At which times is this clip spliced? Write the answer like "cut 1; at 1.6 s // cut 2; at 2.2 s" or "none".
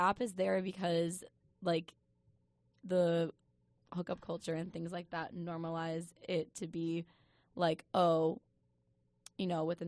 none